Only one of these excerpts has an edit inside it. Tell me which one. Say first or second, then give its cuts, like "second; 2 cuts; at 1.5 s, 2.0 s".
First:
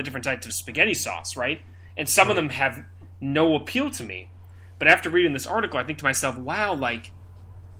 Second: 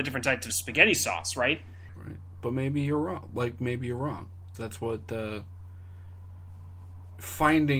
second; 2 cuts; at 1.9 s, 4.5 s